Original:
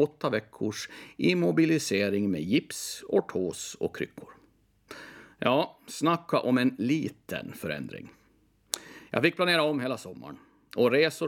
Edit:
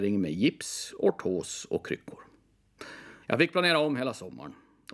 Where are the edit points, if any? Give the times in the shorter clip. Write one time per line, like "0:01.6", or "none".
0:03.2